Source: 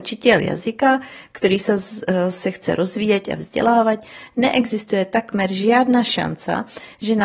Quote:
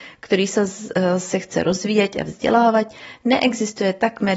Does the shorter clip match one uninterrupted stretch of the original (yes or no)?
yes